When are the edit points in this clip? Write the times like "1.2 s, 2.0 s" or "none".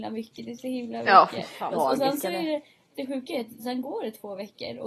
1.7 s